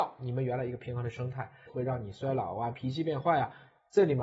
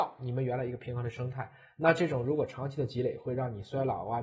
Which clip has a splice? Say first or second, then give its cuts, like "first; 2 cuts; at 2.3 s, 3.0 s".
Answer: first; 2 cuts; at 1.7 s, 2.7 s